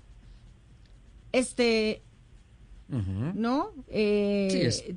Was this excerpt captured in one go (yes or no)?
no